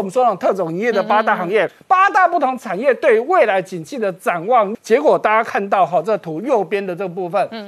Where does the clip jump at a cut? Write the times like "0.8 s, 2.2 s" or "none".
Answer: 1.7 s, 4.7 s